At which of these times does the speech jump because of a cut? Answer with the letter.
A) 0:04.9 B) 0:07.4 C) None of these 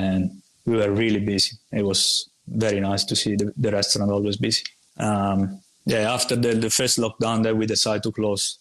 A